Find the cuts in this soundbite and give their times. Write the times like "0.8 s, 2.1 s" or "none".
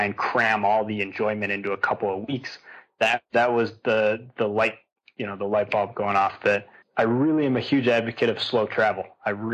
6.8 s